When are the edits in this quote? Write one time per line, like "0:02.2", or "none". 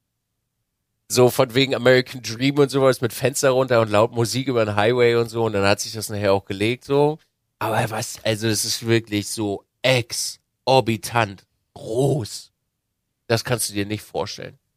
0:13.1